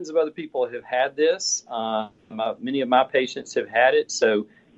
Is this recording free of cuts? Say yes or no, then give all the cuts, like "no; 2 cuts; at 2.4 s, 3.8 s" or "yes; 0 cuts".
yes; 0 cuts